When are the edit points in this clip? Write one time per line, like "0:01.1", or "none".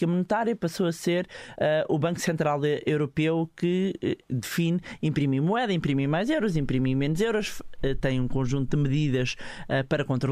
none